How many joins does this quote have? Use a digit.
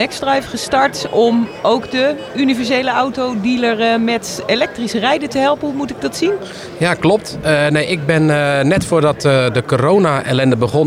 0